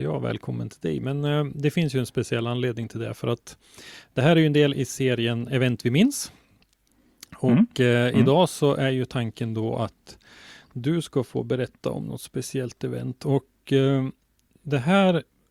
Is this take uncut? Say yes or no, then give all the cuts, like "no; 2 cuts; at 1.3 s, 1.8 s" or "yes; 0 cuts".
yes; 0 cuts